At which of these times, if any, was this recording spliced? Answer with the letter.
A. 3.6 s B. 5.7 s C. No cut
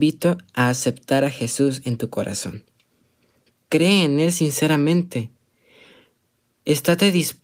C